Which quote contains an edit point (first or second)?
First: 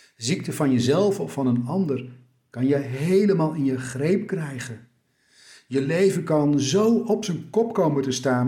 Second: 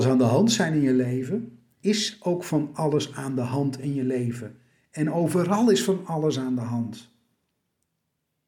second